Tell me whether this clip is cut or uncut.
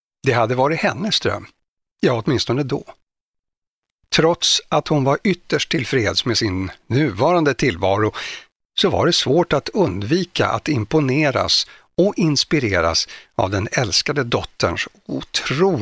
uncut